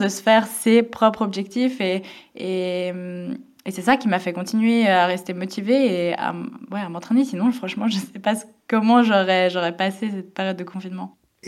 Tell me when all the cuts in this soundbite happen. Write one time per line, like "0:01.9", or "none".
none